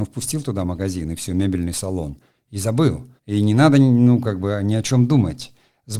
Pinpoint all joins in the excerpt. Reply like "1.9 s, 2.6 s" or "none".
3.2 s